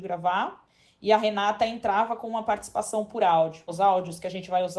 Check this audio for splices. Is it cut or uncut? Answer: cut